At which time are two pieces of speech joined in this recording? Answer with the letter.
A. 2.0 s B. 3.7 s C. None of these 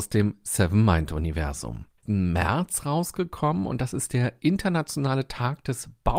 A